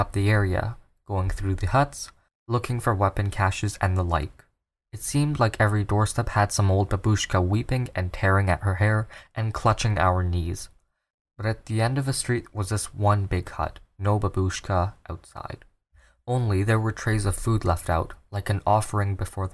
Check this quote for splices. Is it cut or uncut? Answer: uncut